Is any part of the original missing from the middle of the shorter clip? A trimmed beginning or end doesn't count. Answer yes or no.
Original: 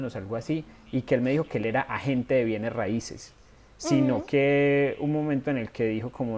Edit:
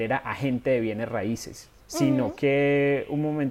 yes